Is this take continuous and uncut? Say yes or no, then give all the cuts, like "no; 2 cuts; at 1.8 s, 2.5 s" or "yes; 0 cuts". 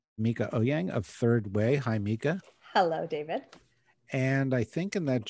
yes; 0 cuts